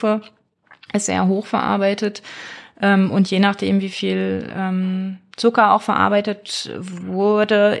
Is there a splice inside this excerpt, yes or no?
no